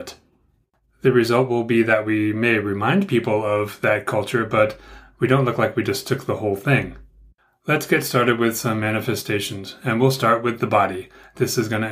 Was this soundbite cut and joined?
no; 0 cuts

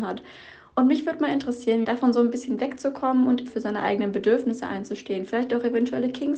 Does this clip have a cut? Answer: yes; 2 cuts; at 1.8 s, 3.5 s

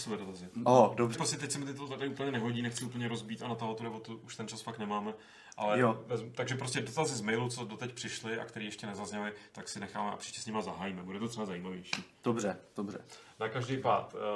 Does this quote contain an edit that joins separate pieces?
yes; 1 cut; at 1.1 s

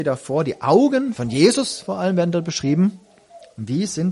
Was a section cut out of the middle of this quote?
yes; 1 cut; at 1.1 s

